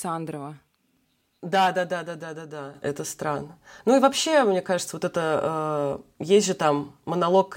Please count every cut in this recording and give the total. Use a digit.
0